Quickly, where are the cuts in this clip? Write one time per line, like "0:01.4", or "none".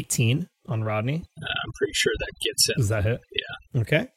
none